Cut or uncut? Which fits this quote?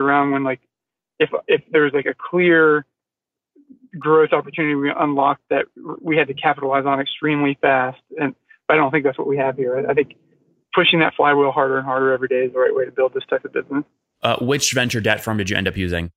uncut